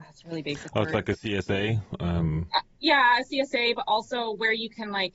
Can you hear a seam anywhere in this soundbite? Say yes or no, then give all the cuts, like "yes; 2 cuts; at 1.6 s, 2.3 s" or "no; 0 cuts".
no; 0 cuts